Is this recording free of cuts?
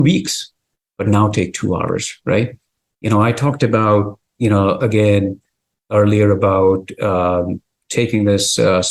yes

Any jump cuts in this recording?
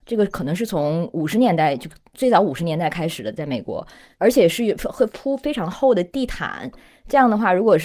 no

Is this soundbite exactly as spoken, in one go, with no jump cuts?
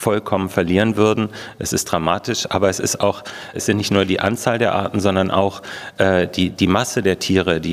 no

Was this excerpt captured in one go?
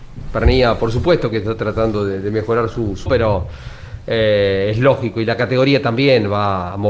no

